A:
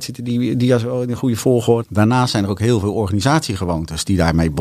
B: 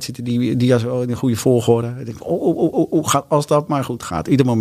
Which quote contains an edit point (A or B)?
A